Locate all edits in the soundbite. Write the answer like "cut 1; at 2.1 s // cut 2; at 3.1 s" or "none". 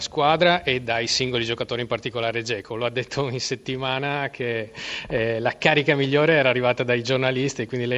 none